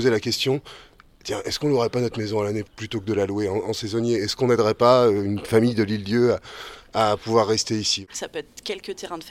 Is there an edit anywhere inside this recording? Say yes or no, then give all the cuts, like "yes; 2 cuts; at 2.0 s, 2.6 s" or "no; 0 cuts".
no; 0 cuts